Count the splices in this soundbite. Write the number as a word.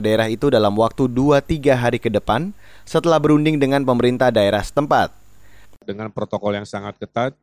one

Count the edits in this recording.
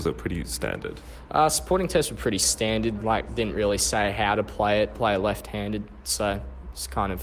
one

